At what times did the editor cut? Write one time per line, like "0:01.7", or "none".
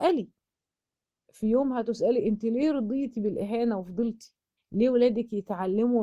0:04.6